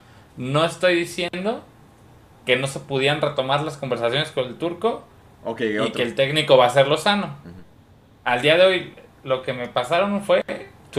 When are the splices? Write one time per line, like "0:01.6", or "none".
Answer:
none